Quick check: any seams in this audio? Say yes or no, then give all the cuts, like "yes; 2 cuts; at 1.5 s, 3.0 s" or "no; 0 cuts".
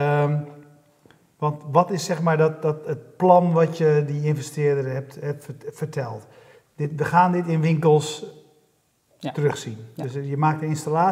no; 0 cuts